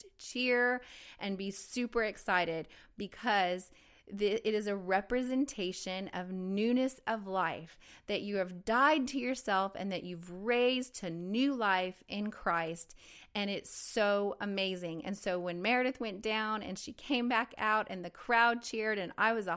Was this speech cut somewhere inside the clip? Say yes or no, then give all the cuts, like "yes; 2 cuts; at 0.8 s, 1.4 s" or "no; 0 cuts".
no; 0 cuts